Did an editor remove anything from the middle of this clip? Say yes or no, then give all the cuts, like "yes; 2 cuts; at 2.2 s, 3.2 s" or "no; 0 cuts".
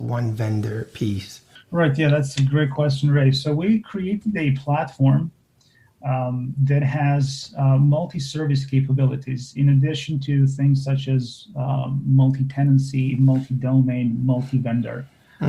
no; 0 cuts